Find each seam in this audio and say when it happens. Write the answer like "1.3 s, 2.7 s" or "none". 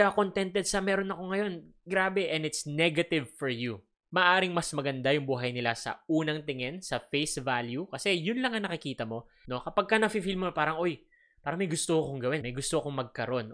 3.9 s, 9.4 s, 12.4 s